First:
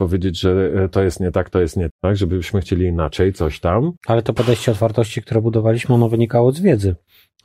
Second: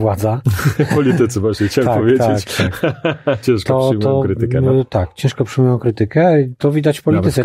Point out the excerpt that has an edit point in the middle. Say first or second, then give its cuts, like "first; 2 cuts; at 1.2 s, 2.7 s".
first; 2 cuts; at 1.9 s, 4.0 s